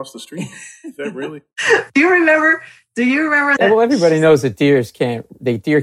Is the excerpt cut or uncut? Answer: cut